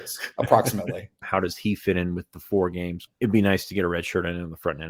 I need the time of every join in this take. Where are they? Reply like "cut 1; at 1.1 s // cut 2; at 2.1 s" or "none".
cut 1; at 1.2 s // cut 2; at 3.1 s